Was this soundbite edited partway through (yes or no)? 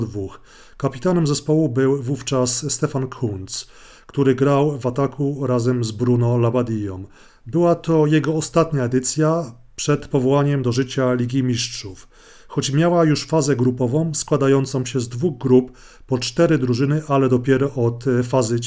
yes